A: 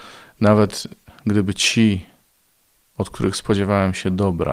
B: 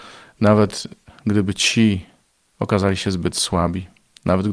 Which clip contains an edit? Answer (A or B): B